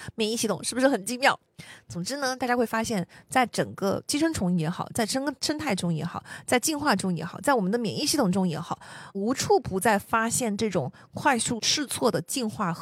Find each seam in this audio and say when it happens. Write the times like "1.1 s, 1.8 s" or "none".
9.1 s, 11.6 s